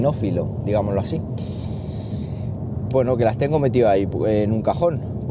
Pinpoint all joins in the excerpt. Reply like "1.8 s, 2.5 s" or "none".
2.9 s